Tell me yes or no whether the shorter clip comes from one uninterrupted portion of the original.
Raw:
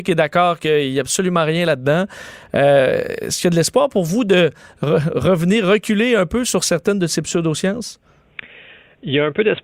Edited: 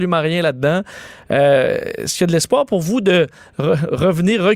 yes